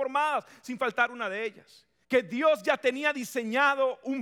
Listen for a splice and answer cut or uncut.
cut